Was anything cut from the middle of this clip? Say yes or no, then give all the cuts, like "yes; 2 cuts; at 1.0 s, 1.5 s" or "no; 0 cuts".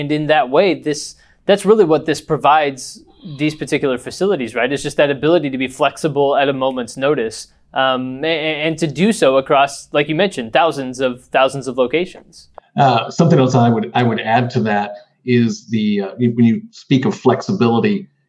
no; 0 cuts